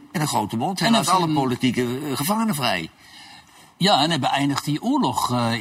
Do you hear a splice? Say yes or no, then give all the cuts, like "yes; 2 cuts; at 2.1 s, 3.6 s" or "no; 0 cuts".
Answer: no; 0 cuts